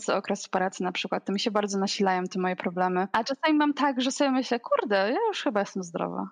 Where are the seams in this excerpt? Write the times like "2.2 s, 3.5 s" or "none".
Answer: none